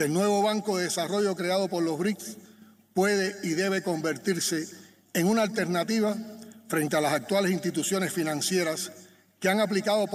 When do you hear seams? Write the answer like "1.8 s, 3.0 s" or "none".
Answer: none